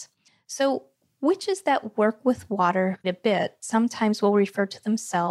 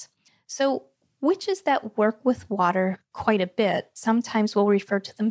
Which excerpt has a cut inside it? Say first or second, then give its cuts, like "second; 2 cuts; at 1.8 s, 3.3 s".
first; 1 cut; at 3.0 s